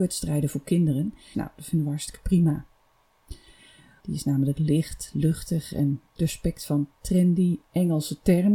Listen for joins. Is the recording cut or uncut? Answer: cut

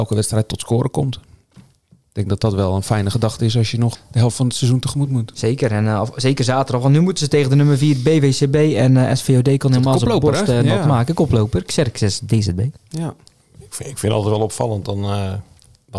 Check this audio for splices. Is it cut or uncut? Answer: cut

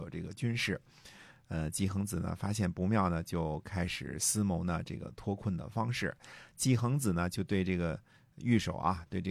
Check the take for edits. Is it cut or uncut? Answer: uncut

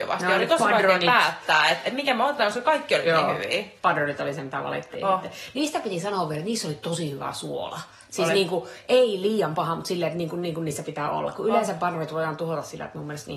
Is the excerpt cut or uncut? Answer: cut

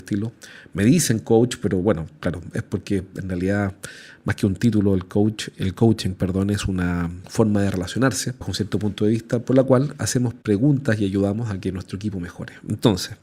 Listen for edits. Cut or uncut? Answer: uncut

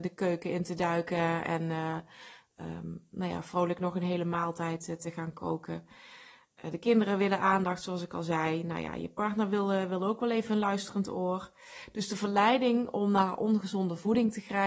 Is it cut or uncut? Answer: uncut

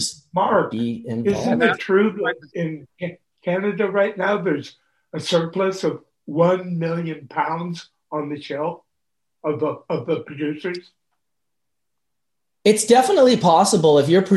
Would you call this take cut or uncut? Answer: uncut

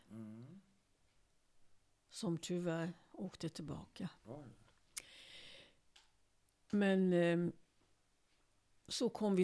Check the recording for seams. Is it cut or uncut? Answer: cut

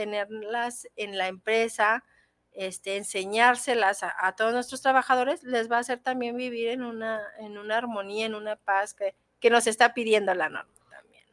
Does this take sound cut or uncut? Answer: uncut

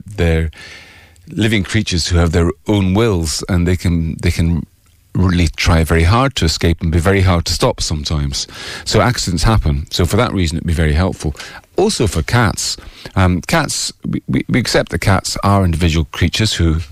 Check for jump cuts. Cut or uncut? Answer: uncut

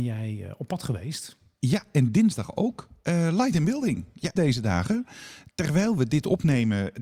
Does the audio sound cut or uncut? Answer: cut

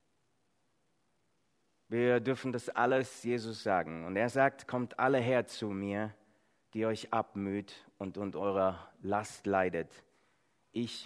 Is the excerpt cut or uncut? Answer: uncut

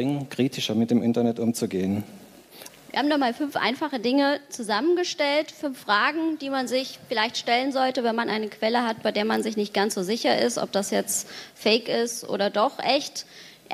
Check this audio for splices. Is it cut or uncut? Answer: cut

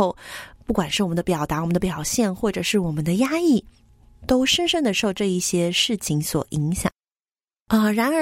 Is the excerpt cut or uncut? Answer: uncut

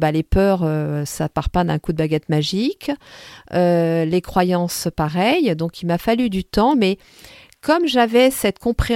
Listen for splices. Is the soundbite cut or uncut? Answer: uncut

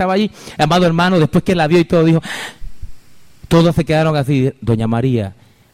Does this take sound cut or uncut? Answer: uncut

